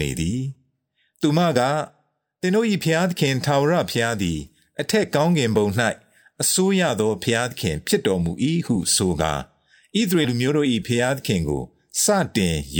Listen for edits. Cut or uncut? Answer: cut